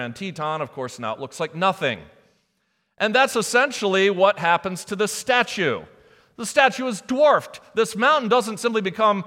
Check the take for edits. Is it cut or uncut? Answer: uncut